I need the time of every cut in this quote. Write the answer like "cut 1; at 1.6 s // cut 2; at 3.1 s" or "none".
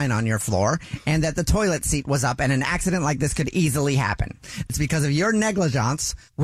cut 1; at 4.7 s